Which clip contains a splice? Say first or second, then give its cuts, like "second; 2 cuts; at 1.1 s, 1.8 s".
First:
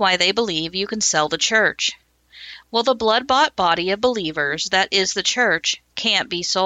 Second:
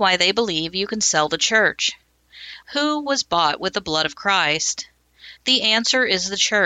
second; 2 cuts; at 2.6 s, 5.4 s